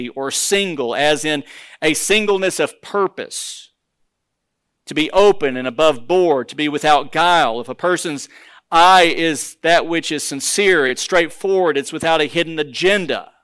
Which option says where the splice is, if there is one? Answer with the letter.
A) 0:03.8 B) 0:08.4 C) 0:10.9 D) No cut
D